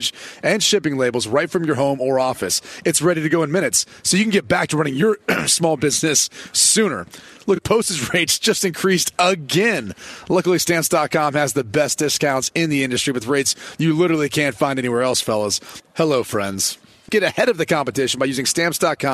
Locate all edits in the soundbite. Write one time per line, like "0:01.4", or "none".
0:15.8
0:17.1